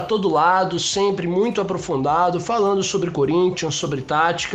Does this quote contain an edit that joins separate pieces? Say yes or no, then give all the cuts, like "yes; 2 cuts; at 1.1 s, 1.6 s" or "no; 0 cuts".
no; 0 cuts